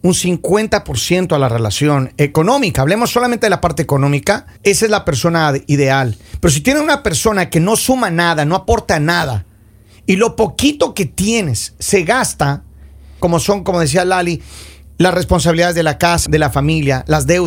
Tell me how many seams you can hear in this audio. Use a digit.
3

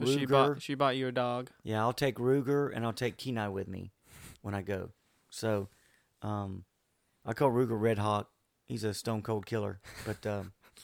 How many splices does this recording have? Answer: 0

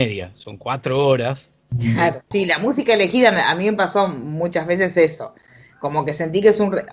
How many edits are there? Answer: 1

